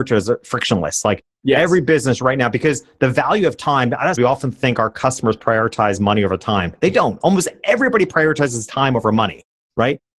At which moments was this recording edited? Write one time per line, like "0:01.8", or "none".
0:04.1

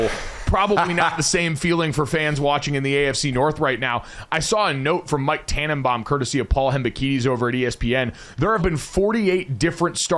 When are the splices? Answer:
0:08.6

